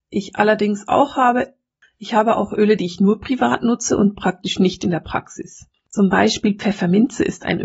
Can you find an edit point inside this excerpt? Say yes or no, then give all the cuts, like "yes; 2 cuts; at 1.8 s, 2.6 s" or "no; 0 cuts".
no; 0 cuts